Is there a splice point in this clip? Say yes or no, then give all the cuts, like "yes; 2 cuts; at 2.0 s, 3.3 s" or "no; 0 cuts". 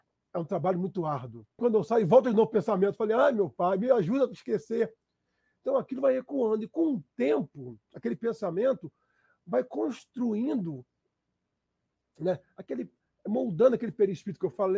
yes; 1 cut; at 1.6 s